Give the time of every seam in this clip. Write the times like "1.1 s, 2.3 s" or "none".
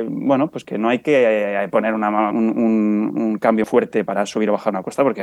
2.3 s, 3.6 s